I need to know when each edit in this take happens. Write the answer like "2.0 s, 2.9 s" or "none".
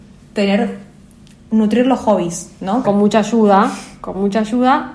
2.8 s